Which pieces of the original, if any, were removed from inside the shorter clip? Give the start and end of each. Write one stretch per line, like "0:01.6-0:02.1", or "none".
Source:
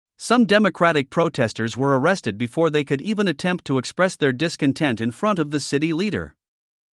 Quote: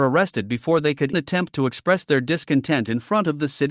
0:03.0-0:03.3